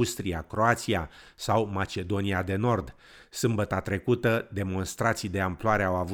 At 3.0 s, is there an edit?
no; 0 cuts

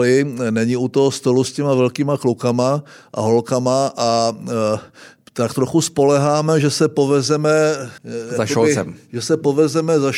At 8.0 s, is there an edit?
yes; 1 cut; at 8.0 s

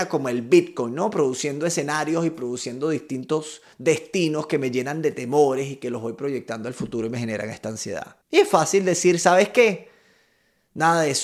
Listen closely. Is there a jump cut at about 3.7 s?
yes; 2 cuts; at 3.7 s, 8.2 s

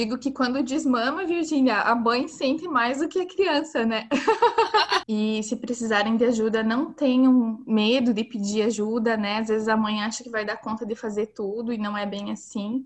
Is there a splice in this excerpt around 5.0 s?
yes; 1 cut; at 5.0 s

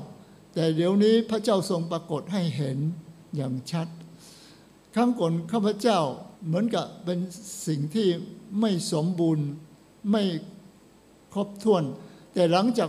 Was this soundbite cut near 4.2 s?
no; 1 cut; at 6.4 s

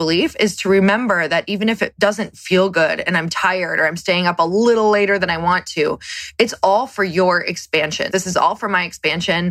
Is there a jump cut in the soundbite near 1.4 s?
no; 1 cut; at 8.1 s

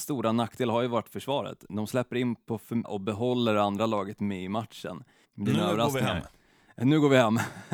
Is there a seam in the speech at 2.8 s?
yes; 2 cuts; at 2.8 s, 5.2 s

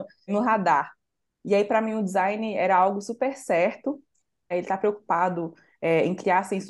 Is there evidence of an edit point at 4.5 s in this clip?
yes; 1 cut; at 4.5 s

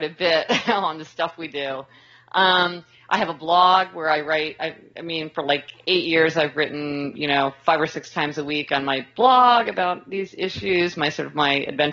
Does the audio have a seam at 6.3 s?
no; 0 cuts

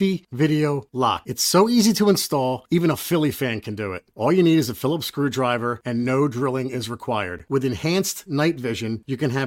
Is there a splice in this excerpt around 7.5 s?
yes; 1 cut; at 7.5 s

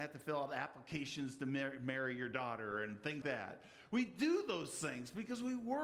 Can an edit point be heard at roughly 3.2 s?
yes; 1 cut; at 3.2 s

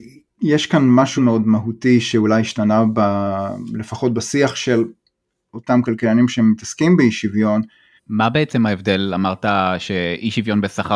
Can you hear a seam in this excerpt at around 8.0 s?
yes; 2 cuts; at 1.2 s, 8.0 s

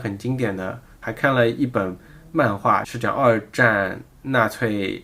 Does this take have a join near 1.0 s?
yes; 2 cuts; at 1.0 s, 2.8 s

